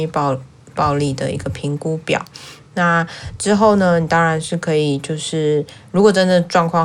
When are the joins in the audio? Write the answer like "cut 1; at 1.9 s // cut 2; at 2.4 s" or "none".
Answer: none

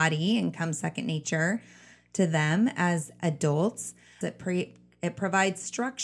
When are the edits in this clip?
cut 1; at 4.2 s

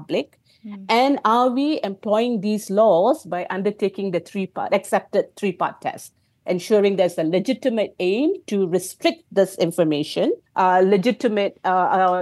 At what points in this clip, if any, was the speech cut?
cut 1; at 10.5 s

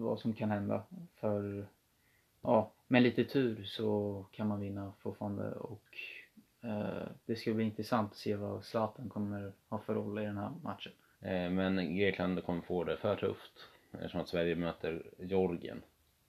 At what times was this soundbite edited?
cut 1; at 2.7 s // cut 2; at 11.1 s

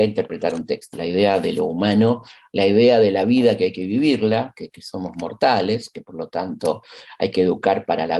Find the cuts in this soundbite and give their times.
cut 1; at 0.9 s

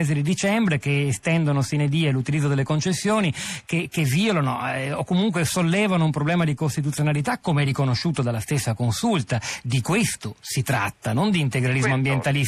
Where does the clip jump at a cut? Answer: none

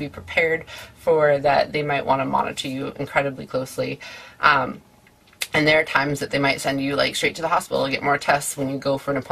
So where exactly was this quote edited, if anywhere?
none

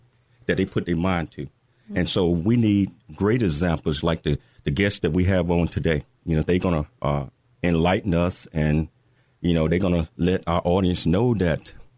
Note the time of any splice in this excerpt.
cut 1; at 6.4 s

